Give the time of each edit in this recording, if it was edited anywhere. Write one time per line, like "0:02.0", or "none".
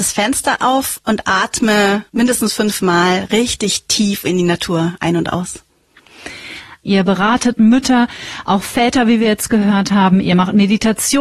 0:02.1
0:06.8